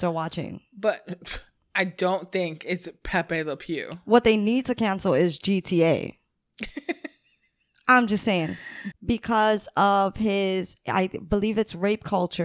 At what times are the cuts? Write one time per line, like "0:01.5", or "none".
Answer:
0:08.9